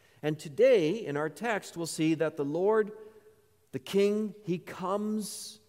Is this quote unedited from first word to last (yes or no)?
yes